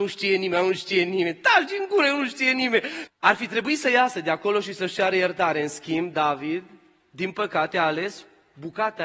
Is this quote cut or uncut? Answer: cut